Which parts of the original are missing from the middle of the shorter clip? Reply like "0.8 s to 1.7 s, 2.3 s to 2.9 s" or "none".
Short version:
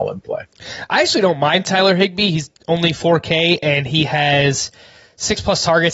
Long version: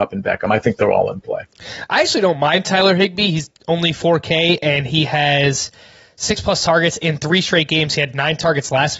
none